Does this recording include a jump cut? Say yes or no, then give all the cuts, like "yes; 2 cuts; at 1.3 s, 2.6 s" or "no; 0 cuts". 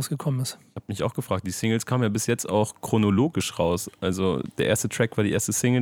no; 0 cuts